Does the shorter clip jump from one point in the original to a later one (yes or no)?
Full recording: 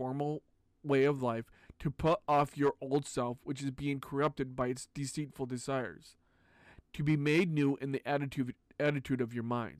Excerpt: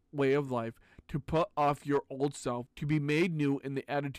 yes